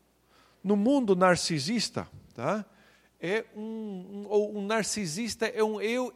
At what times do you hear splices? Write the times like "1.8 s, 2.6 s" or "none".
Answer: none